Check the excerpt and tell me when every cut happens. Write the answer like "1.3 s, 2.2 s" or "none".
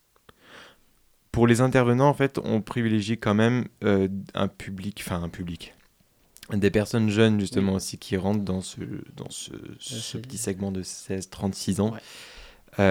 none

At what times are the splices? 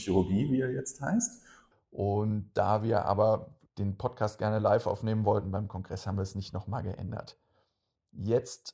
1.7 s, 3.7 s

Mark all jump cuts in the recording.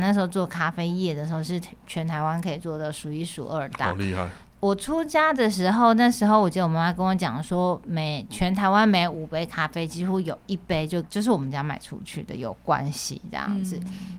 none

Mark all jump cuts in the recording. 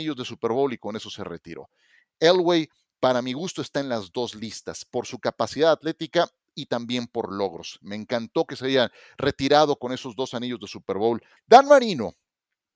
11.4 s

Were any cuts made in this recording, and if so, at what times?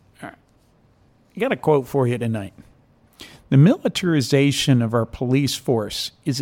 none

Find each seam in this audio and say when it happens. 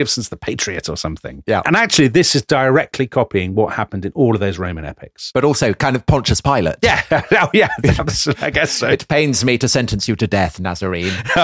none

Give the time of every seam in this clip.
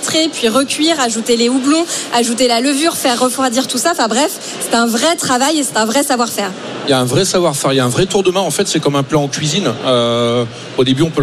none

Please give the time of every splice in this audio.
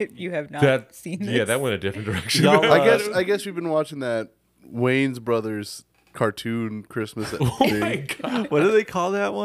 none

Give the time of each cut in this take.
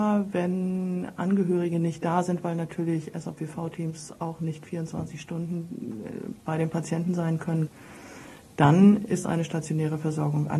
none

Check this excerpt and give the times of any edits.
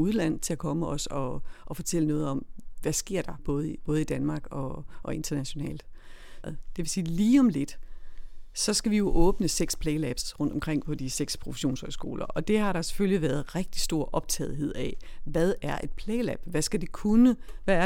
3.4 s, 6.4 s

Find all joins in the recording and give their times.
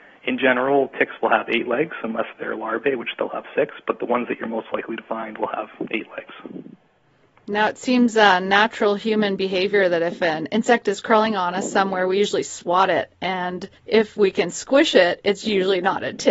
13.8 s

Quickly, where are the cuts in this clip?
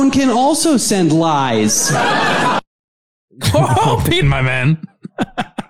4.2 s

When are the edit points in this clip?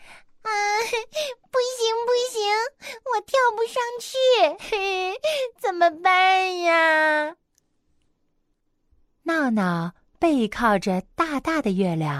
8.5 s

